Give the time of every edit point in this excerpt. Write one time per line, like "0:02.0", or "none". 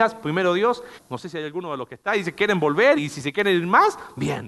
0:01.0
0:03.0